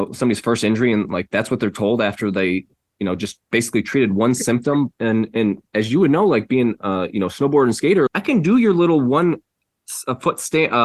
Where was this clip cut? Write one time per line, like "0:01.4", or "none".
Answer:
0:05.0
0:08.1